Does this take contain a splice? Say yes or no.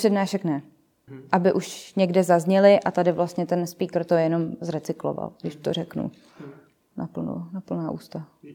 yes